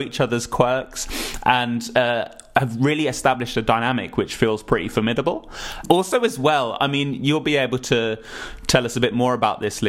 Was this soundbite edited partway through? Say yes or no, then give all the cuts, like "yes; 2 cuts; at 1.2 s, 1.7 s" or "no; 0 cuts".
no; 0 cuts